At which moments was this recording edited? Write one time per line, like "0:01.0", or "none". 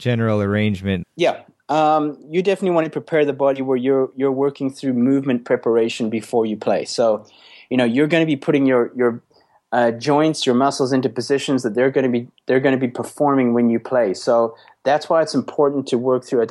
0:01.0

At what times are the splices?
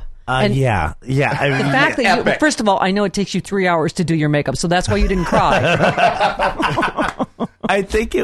none

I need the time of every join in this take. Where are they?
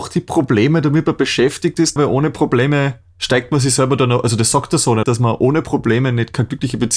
0:02.0
0:05.0

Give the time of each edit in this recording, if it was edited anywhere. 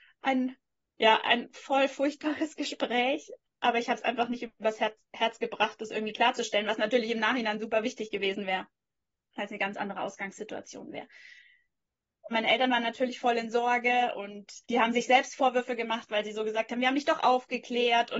0:12.3
0:14.6

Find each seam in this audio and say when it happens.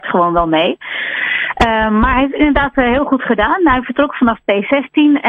none

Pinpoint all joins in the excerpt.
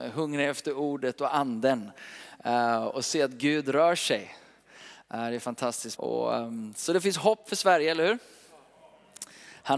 0:06.0

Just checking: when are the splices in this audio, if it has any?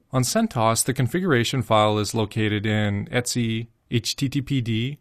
none

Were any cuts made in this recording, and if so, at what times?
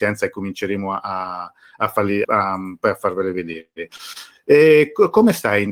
0:02.2

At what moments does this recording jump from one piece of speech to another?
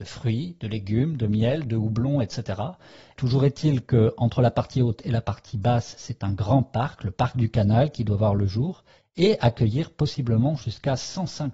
0:03.2

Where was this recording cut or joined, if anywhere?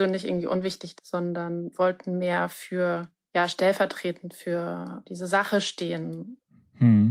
0:01.0
0:05.0

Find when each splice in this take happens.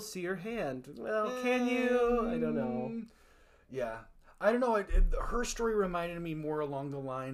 none

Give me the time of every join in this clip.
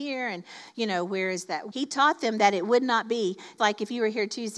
0:01.7
0:03.6

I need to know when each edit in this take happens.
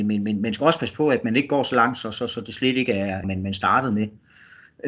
0:03.2

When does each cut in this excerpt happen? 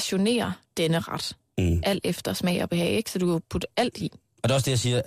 none

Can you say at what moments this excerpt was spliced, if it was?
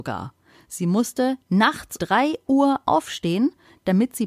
0:02.0

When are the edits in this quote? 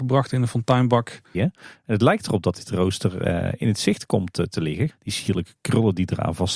0:01.3
0:04.9

